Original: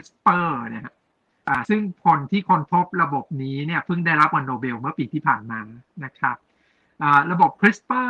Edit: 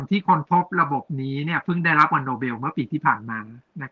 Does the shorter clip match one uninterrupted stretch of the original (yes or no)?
yes